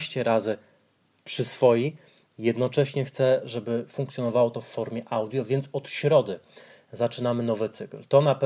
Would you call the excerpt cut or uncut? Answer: uncut